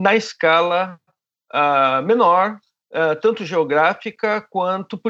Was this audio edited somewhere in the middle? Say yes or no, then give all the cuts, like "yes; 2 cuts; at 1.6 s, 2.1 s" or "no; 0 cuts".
no; 0 cuts